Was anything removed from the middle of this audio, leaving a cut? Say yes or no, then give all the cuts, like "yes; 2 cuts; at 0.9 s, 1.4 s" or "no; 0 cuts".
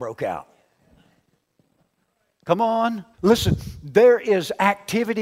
yes; 1 cut; at 3.1 s